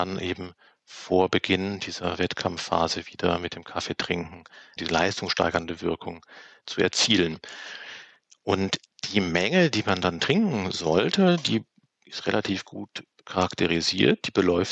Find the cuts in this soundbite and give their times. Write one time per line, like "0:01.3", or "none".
0:04.8